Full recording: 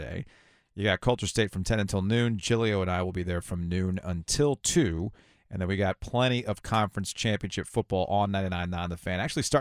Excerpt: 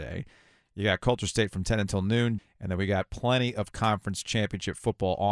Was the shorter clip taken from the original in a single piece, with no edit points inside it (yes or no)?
no